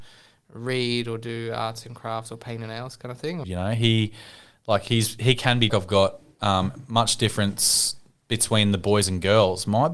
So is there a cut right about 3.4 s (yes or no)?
yes